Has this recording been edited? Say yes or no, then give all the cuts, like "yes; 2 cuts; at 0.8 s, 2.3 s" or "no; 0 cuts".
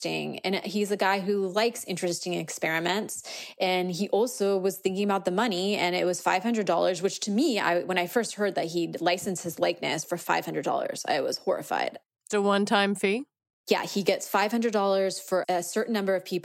yes; 2 cuts; at 12.3 s, 15.4 s